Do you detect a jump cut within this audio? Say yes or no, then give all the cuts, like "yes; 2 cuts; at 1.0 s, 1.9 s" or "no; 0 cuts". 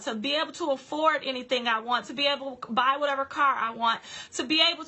no; 0 cuts